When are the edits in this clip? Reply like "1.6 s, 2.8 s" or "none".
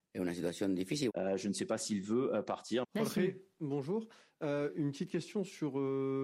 1.1 s, 2.8 s

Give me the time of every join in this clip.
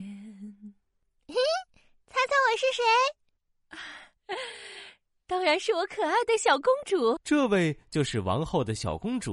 7.2 s

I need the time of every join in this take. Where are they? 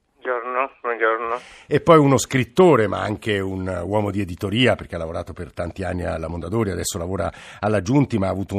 none

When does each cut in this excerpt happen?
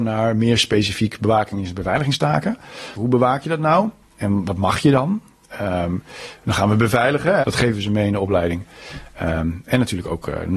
2.9 s, 7.4 s

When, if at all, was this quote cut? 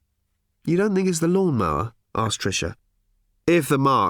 none

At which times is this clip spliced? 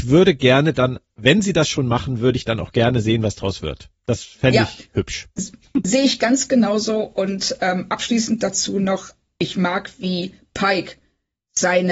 none

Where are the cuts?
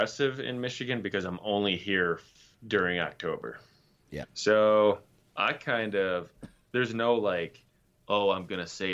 4.2 s

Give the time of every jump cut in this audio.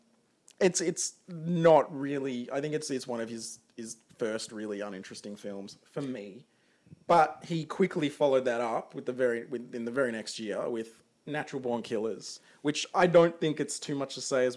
none

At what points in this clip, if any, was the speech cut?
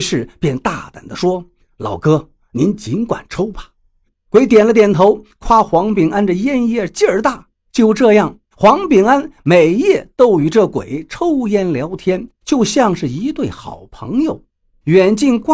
none

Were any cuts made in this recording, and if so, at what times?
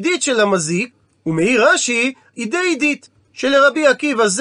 2.3 s

